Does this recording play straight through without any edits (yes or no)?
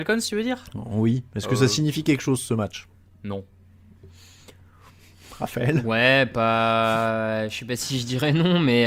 yes